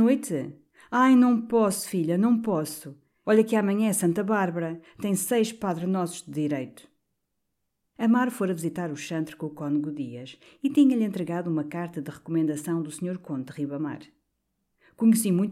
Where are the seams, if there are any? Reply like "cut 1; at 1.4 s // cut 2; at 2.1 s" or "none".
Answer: cut 1; at 3.2 s